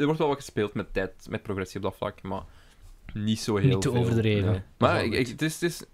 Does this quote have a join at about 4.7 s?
yes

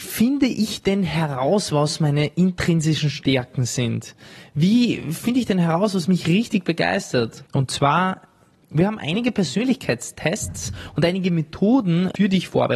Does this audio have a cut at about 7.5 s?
yes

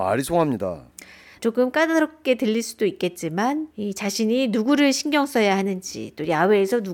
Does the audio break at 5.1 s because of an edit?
no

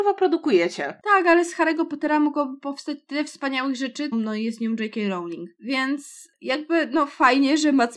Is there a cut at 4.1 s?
yes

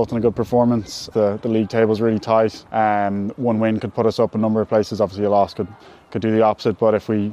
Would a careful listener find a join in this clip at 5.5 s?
no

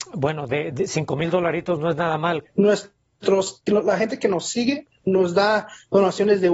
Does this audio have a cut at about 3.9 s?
no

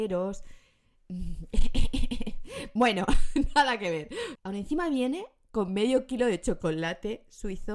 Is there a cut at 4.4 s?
yes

